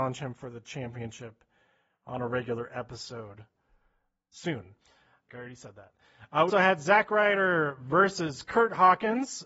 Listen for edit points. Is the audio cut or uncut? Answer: cut